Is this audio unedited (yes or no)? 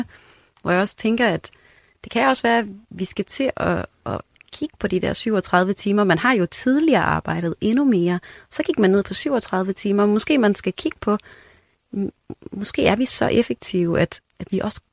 yes